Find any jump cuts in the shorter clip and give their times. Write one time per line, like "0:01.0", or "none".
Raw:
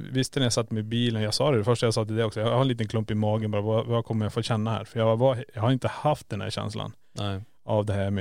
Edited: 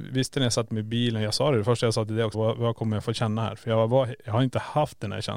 0:02.3